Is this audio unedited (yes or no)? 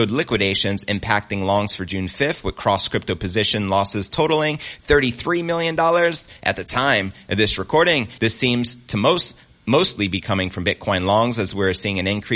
no